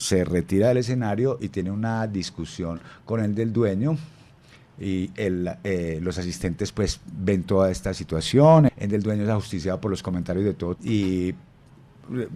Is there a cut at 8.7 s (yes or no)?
yes